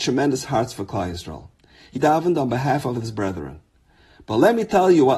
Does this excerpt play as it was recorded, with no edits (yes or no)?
no